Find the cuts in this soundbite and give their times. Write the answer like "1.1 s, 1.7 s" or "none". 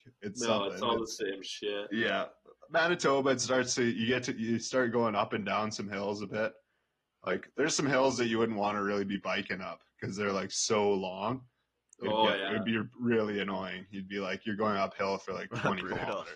none